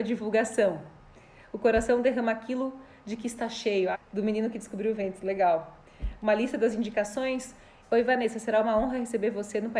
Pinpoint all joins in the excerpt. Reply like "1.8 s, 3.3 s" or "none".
3.9 s, 7.8 s